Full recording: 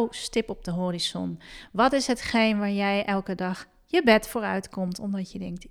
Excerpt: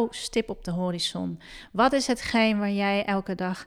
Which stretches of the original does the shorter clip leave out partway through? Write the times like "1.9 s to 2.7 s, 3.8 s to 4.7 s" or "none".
none

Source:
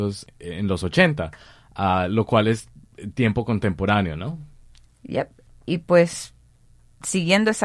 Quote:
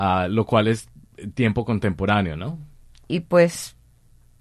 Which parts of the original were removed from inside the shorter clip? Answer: 4.8 s to 5.6 s

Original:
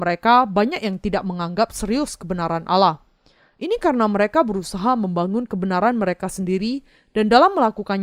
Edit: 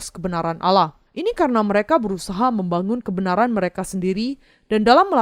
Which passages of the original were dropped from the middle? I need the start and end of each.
3.1 s to 3.5 s

